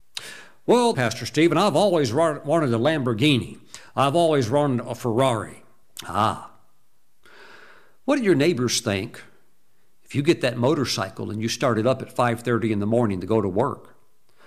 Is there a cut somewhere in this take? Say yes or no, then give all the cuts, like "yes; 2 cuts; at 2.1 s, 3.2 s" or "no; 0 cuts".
yes; 2 cuts; at 0.9 s, 5.8 s